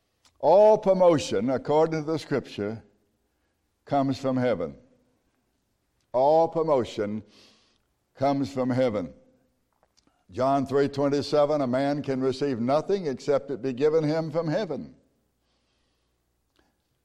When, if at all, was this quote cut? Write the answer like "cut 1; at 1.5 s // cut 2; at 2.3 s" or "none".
none